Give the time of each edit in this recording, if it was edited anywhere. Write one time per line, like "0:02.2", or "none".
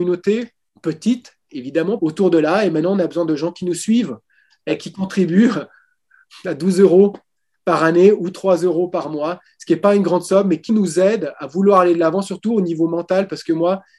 0:02.0
0:10.7